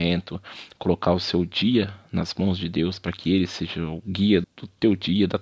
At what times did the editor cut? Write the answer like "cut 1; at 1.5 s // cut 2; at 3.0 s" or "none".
cut 1; at 4.4 s